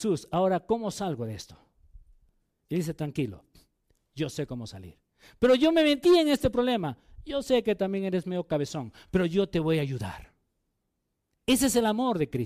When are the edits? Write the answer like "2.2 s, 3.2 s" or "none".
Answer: none